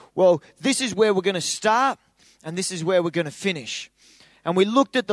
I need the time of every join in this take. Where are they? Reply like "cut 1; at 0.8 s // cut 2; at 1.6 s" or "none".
none

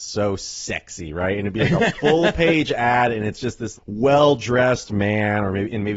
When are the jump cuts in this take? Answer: cut 1; at 3.8 s

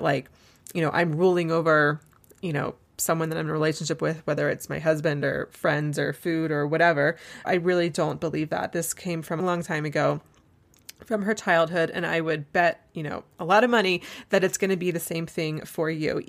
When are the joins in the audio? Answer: cut 1; at 7.4 s // cut 2; at 9.4 s

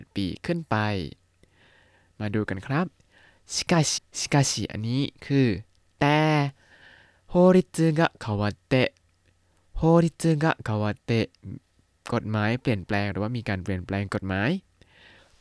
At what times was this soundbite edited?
cut 1; at 4.0 s

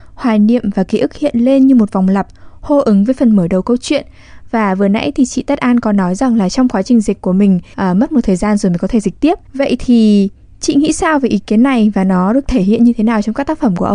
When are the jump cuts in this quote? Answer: cut 1; at 7.7 s // cut 2; at 9.5 s

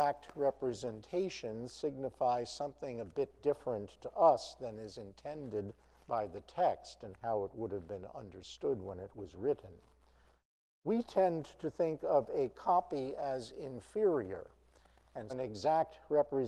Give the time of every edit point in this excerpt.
cut 1; at 15.3 s

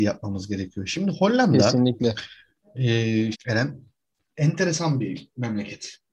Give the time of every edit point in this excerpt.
cut 1; at 3.3 s

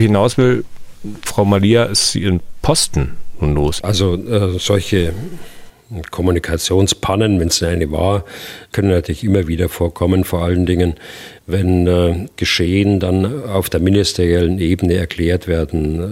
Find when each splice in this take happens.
cut 1; at 3.8 s // cut 2; at 12.4 s

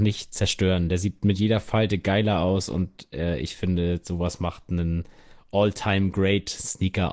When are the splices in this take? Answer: none

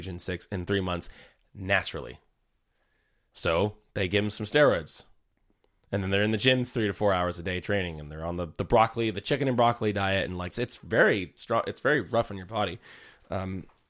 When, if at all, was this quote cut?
cut 1; at 10.5 s

